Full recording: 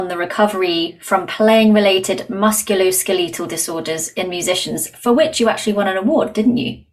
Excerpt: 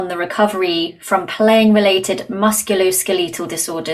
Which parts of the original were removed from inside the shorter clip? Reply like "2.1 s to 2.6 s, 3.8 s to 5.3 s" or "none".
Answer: none

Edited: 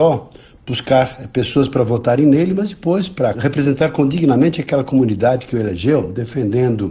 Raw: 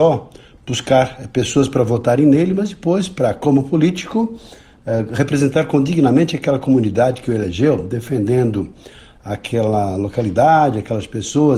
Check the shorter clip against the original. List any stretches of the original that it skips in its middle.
3.3 s to 5.1 s

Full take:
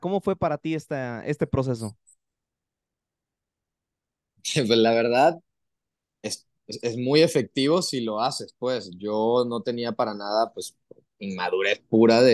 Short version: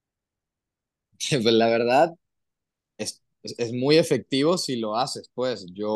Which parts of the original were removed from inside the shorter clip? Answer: none

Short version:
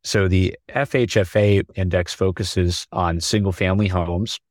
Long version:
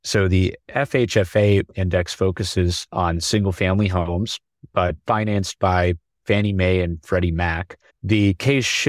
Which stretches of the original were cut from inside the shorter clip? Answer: none

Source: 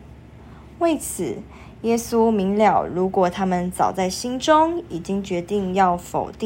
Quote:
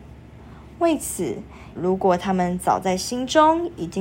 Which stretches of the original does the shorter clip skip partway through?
1.8 s to 2.9 s

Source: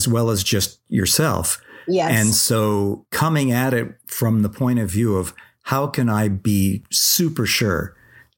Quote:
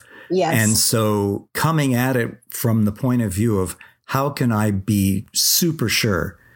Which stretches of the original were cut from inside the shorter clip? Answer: none

